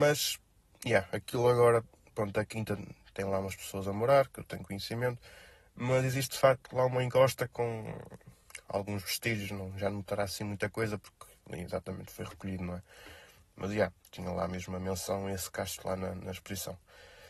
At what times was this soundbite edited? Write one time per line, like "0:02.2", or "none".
none